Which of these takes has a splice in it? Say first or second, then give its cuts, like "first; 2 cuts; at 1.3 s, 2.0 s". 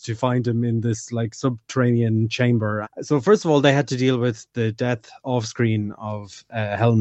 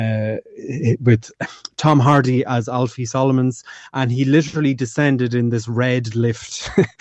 first; 1 cut; at 2.8 s